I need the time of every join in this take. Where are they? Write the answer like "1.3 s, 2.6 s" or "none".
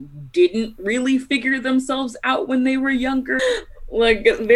3.4 s